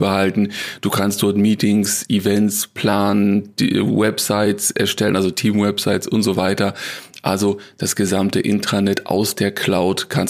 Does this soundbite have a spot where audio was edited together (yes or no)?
no